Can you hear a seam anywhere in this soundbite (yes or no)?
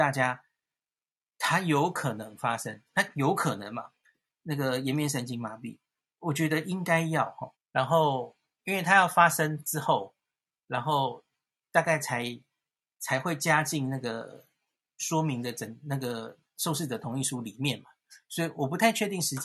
yes